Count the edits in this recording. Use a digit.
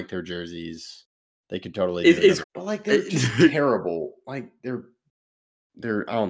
1